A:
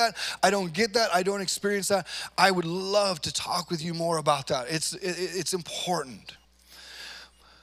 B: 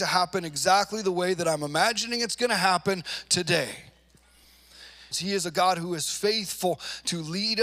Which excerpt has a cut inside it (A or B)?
B